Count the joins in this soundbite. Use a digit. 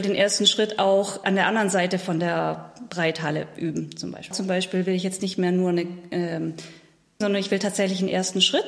3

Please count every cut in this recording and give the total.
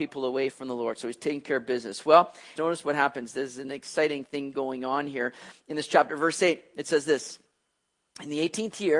1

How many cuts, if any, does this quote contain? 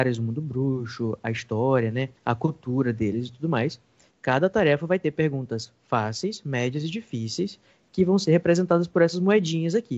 2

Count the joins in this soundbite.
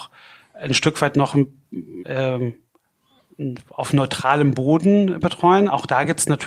1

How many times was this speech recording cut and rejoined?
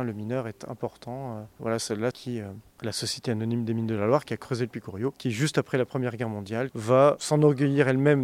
2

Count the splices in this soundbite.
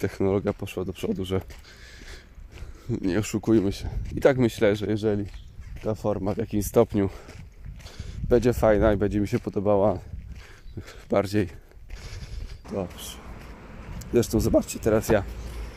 2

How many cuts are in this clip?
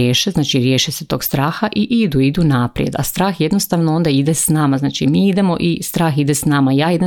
0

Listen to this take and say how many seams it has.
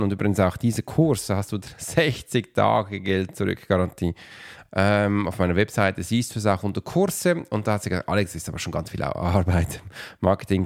1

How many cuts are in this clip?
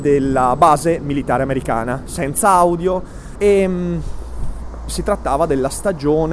1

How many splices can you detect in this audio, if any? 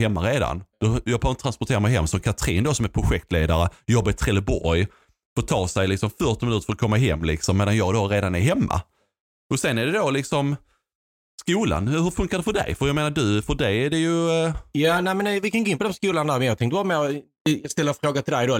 0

